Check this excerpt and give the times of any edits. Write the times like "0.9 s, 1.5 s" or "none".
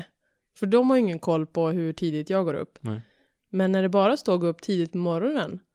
none